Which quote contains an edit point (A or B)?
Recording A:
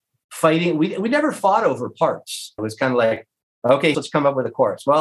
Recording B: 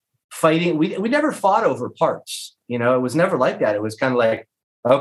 A